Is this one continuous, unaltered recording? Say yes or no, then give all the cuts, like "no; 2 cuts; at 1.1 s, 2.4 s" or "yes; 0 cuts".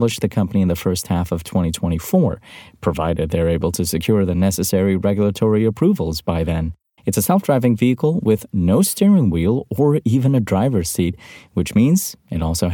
no; 1 cut; at 7.0 s